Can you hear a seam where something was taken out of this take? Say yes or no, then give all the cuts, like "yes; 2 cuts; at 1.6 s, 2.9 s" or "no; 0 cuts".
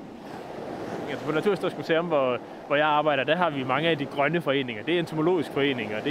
yes; 1 cut; at 1.1 s